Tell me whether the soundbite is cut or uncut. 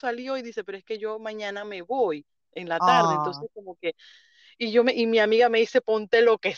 uncut